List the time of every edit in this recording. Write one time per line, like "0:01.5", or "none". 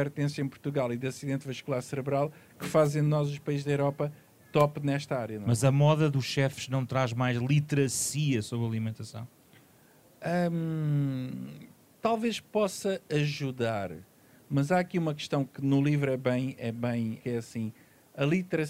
0:17.2